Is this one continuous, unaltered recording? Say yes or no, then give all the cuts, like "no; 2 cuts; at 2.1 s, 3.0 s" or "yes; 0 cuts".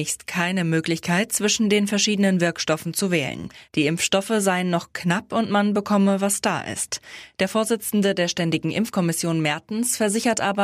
no; 1 cut; at 3.7 s